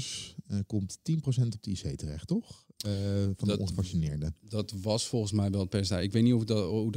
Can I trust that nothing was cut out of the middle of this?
yes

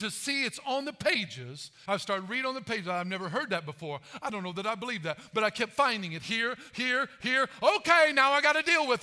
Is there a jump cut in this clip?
yes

